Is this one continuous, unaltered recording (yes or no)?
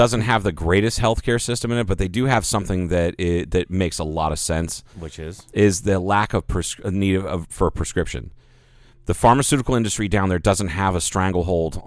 yes